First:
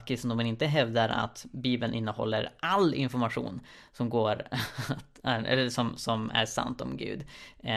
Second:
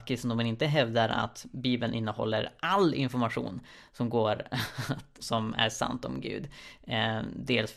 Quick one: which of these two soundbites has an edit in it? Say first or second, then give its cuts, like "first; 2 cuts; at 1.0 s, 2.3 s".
second; 1 cut; at 5.2 s